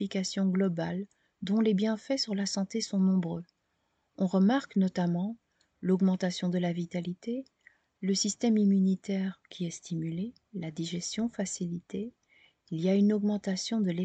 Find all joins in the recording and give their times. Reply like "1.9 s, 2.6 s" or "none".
none